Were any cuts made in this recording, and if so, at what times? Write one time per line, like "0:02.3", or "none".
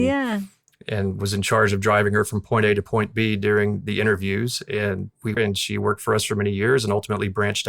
0:05.4